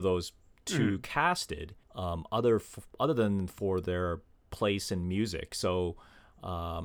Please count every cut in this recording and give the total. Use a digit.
1